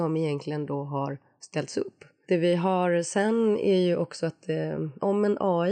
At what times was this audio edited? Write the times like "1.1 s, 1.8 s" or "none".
2.2 s